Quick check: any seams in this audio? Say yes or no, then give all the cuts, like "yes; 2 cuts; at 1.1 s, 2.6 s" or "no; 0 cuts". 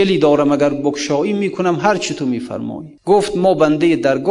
yes; 1 cut; at 3.0 s